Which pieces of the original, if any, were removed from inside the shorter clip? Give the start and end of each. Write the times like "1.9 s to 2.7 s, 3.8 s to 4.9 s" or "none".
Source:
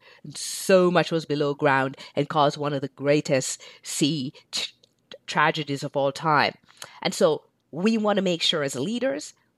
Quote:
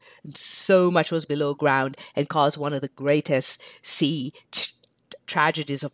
none

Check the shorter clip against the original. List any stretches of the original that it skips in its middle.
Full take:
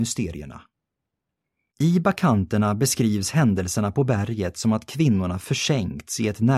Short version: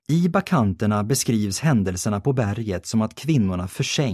none

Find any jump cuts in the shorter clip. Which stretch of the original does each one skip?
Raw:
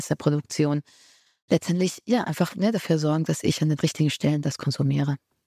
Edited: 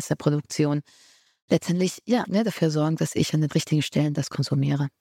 2.2 s to 2.5 s

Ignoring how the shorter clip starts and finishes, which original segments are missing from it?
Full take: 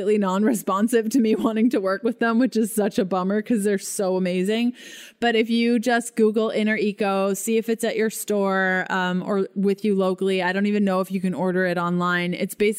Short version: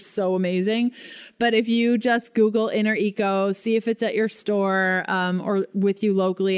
none

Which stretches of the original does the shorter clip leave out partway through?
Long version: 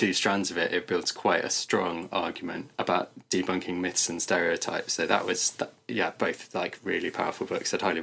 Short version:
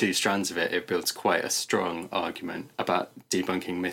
none

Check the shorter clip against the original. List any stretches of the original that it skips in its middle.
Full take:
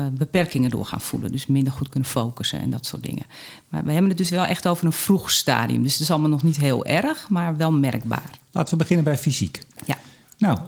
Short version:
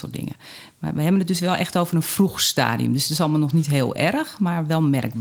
none

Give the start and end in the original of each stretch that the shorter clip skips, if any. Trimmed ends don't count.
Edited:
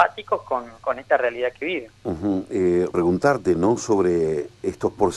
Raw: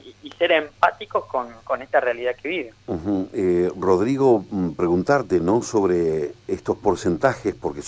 3.7 s to 4.8 s

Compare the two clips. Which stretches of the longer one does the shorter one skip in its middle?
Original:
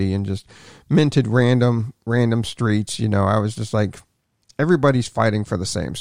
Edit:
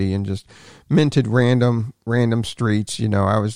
none

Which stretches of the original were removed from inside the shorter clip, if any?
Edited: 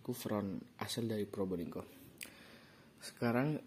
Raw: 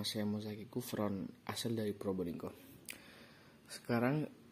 none

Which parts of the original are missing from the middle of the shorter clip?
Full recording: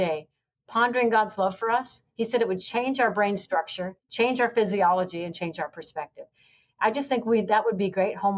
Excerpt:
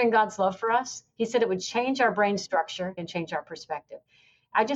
4.0 s to 5.2 s

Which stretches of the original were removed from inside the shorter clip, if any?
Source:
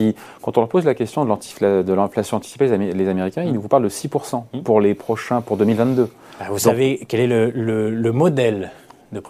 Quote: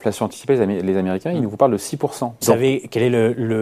4.5 s to 6.6 s

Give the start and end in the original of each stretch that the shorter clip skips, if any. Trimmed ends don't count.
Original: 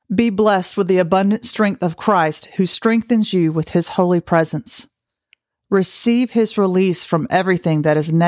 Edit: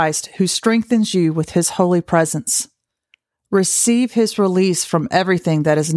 none

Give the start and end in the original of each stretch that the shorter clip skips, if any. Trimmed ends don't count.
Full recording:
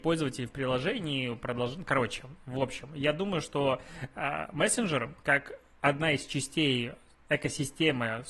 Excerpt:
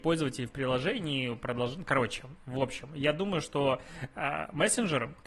none

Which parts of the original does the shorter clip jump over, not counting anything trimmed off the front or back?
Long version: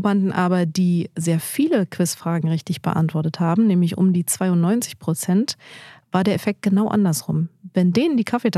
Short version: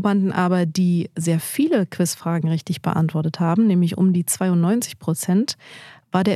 none

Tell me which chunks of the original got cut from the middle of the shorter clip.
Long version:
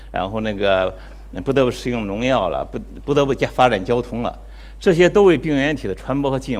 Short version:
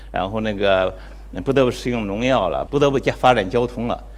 2.7 s to 3.0 s

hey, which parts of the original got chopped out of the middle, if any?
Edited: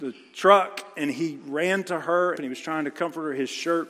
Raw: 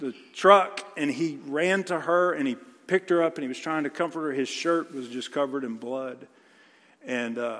2.4 s to 3.3 s

